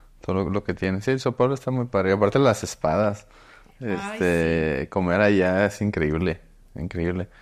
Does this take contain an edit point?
no; 0 cuts

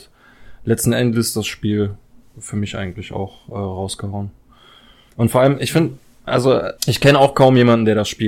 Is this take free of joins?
no; 2 cuts; at 5.1 s, 6.8 s

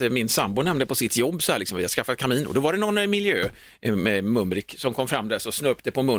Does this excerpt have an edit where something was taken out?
no; 0 cuts

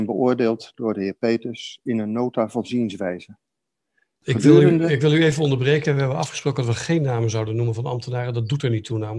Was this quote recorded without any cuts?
yes; 0 cuts

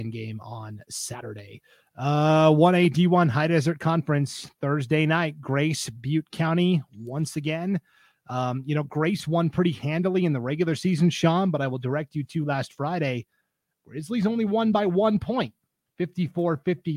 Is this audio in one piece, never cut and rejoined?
yes; 0 cuts

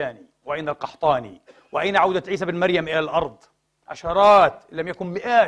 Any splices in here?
yes; 1 cut; at 3.8 s

